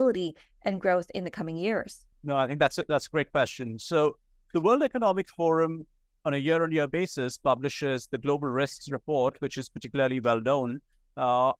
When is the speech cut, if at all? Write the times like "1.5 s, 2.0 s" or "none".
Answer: 2.1 s